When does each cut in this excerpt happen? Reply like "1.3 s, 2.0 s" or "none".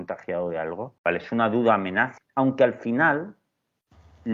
1.0 s, 2.2 s